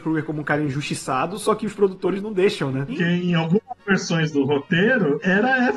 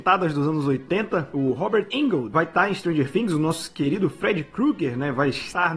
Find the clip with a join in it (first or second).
first